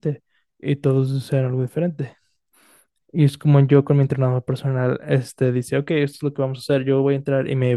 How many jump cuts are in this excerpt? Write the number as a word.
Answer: zero